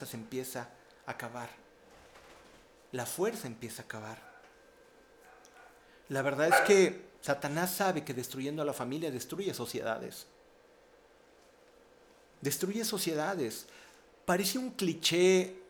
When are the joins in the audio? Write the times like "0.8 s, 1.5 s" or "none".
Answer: none